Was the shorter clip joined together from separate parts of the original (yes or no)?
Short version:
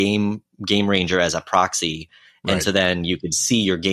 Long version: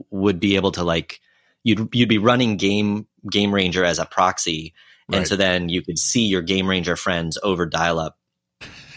no